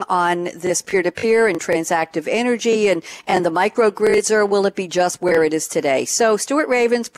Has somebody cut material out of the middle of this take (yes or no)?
no